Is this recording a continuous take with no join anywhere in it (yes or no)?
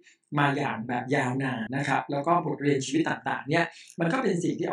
no